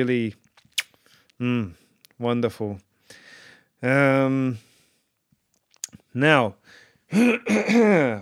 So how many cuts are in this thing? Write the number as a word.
zero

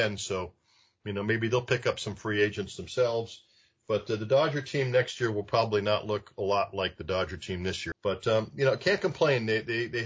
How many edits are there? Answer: one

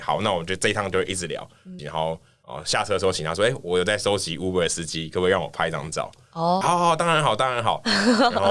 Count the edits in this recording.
two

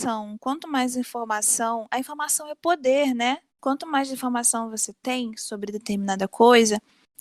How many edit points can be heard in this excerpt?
one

